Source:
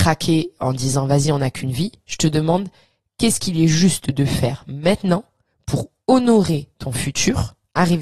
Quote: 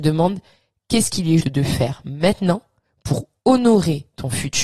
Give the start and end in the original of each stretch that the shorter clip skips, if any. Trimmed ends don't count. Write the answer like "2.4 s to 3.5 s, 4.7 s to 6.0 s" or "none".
3.7 s to 4.0 s